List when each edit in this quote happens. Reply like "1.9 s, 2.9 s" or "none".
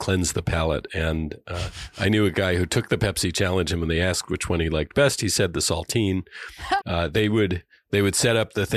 6.8 s